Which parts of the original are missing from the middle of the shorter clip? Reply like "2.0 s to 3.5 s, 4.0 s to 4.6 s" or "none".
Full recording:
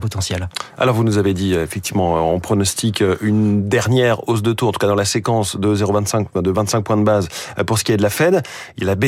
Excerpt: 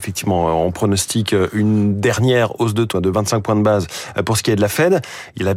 4.6 s to 6.3 s